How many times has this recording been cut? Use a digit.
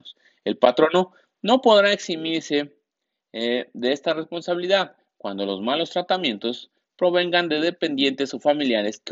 0